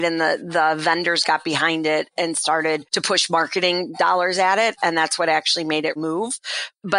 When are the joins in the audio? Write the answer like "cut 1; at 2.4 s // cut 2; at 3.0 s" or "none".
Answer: cut 1; at 6.0 s